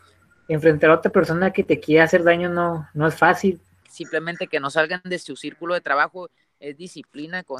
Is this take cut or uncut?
cut